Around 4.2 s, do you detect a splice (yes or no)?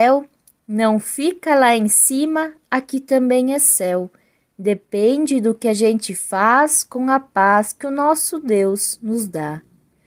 no